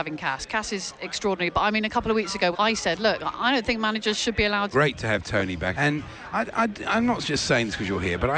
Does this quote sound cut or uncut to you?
cut